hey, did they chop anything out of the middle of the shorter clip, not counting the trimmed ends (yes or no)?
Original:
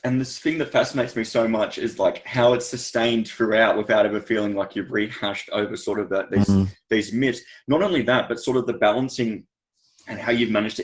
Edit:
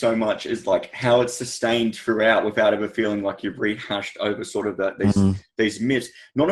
no